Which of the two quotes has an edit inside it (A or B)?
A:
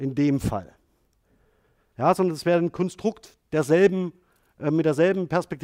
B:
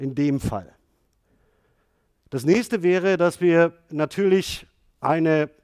A